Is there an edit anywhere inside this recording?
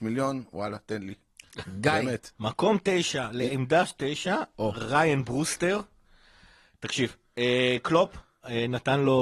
yes; 1 cut; at 2.4 s

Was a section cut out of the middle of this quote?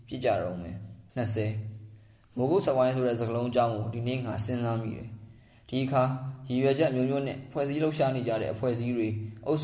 yes; 1 cut; at 1.1 s

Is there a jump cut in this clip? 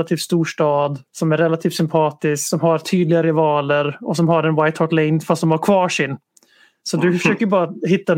yes; 1 cut; at 1.1 s

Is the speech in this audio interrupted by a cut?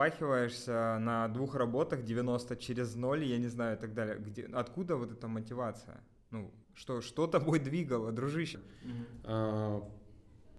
yes; 2 cuts; at 6.6 s, 8.5 s

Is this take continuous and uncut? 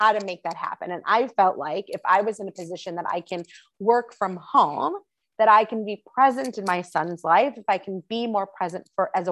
yes; 0 cuts

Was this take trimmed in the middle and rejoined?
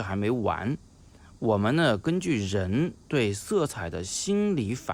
no; 0 cuts

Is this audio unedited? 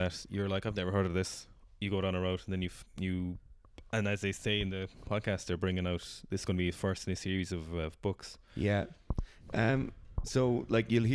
yes; 0 cuts

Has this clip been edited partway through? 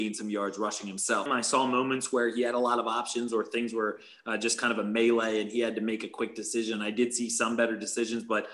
yes; 1 cut; at 1.3 s

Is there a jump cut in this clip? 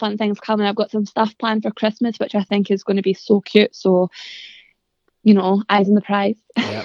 no; 0 cuts

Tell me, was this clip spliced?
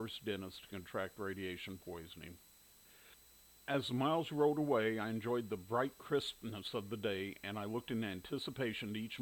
no; 0 cuts

